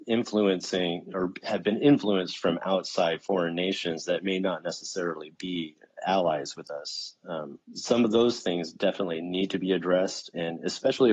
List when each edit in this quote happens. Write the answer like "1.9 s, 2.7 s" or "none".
7.6 s

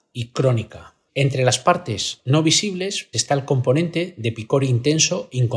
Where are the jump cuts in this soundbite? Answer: 1.1 s, 3.1 s

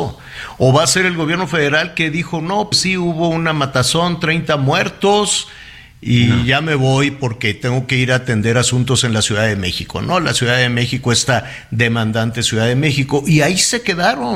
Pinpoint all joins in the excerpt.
2.7 s

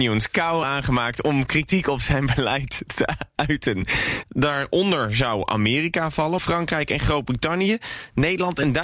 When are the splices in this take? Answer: 4.2 s, 6.4 s

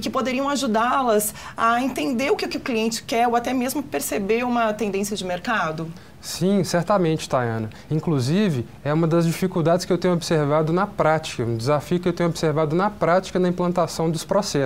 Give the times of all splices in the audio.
none

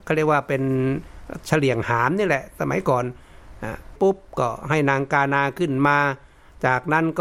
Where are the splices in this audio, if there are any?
4.0 s

